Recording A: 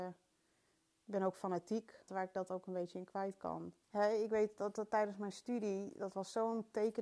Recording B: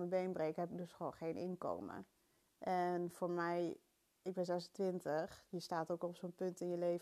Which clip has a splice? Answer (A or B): A